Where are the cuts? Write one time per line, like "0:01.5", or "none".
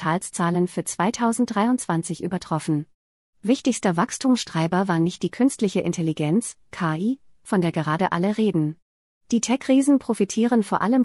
none